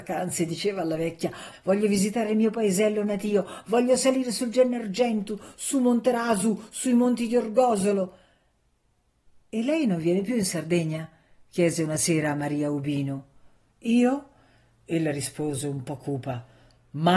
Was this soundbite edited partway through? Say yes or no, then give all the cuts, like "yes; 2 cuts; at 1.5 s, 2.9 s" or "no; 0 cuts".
yes; 1 cut; at 1.5 s